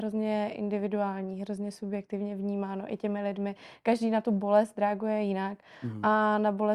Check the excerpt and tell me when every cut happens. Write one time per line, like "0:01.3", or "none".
none